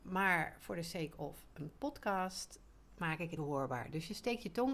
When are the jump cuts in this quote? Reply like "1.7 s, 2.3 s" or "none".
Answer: 3.4 s